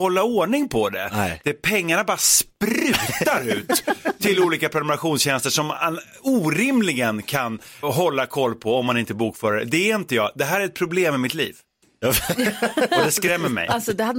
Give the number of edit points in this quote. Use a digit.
1